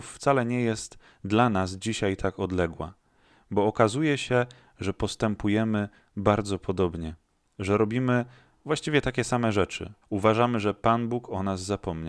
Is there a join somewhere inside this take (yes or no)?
yes